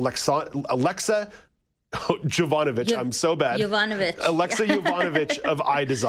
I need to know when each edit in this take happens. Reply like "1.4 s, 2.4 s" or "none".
none